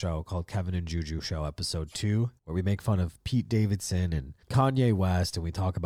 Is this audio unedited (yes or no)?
no